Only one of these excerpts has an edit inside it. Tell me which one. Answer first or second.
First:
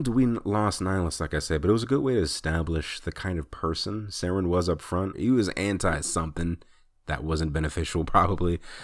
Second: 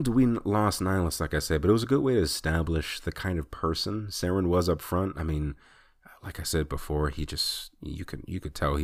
first